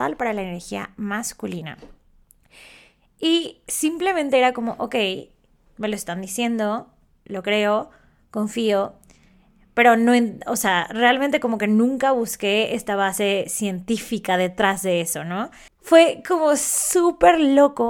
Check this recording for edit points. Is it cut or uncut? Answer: cut